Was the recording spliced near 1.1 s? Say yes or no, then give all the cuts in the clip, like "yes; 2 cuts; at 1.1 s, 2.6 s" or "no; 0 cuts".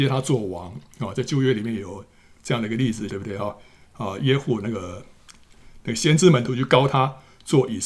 no; 1 cut; at 3.1 s